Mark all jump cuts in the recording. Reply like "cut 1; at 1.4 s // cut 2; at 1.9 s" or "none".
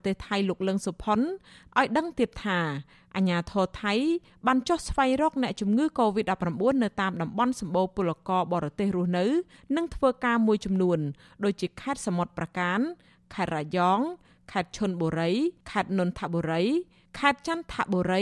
cut 1; at 15.6 s